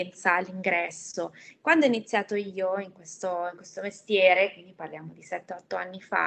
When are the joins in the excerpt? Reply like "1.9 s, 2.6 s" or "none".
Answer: 1.5 s